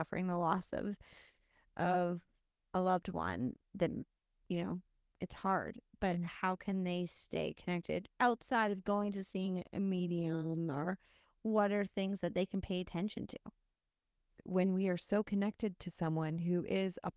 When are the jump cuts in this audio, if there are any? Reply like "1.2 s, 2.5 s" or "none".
none

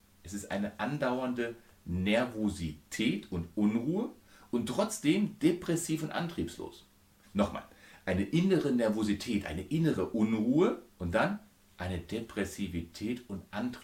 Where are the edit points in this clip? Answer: 7.2 s, 10.9 s

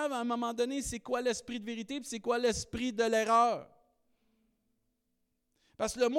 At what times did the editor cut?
none

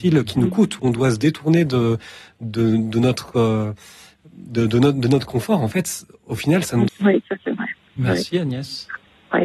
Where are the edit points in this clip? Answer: 6.9 s

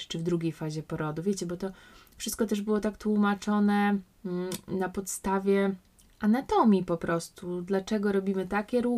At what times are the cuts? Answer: none

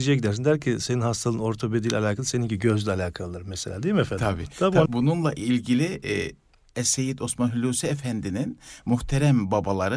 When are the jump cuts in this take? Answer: 4.9 s

